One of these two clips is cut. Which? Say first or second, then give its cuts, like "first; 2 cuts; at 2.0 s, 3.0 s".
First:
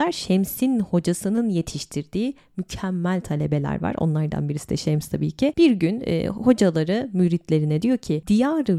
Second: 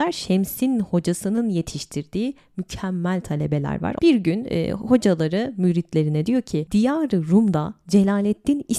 second; 1 cut; at 4.0 s